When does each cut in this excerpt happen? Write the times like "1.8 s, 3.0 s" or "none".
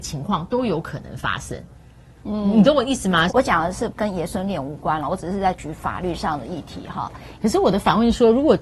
3.3 s, 7.4 s